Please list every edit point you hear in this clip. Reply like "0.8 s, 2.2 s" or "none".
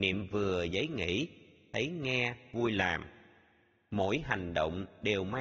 none